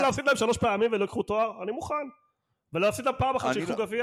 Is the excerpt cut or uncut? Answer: uncut